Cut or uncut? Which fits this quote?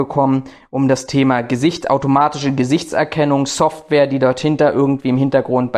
uncut